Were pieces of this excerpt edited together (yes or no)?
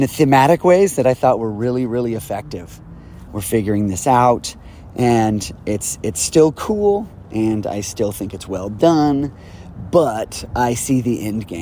yes